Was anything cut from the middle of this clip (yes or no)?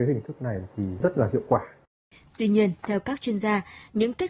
no